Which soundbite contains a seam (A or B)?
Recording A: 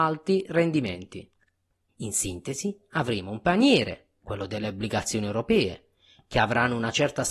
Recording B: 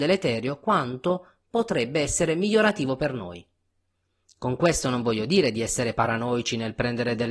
A